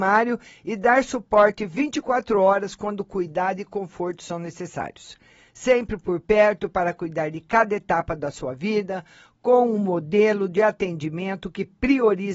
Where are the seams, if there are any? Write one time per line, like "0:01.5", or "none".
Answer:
none